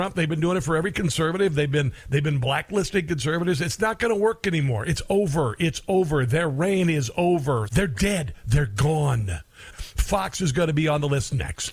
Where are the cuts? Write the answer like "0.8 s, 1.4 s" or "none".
7.7 s, 9.7 s

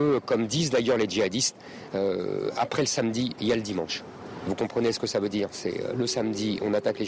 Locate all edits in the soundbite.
none

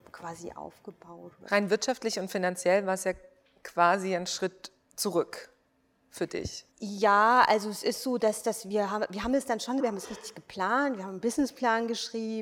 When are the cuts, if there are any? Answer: 6.7 s, 9.8 s

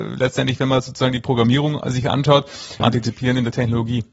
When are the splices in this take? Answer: 2.8 s

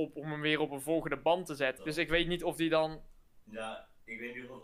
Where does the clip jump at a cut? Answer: 1.8 s, 3.4 s

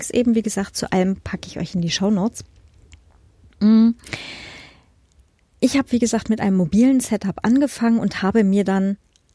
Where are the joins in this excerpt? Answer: none

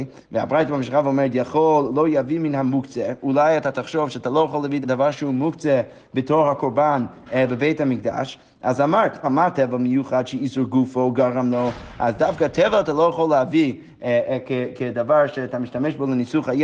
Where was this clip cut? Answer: 4.8 s, 9.2 s

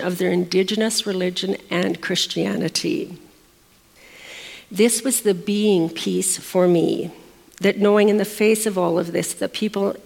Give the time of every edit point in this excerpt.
none

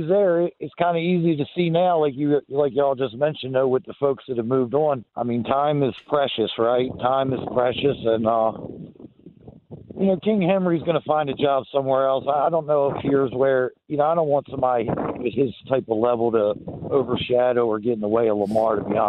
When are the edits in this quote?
5.1 s

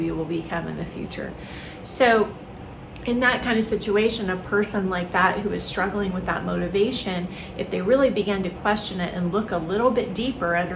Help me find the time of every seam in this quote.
none

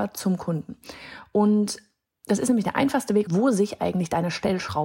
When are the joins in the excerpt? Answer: 3.3 s

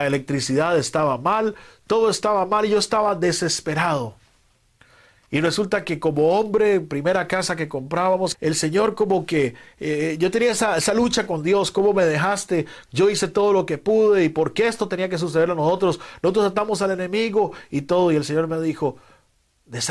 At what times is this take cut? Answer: 8.3 s, 12.9 s

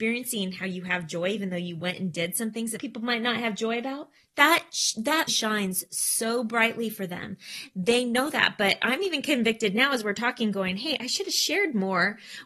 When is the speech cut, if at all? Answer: 2.8 s, 5.3 s, 11.0 s

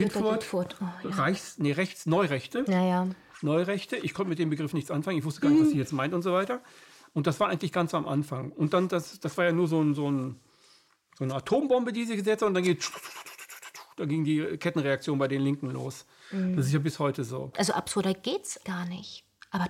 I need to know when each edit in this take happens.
17.5 s, 18.6 s

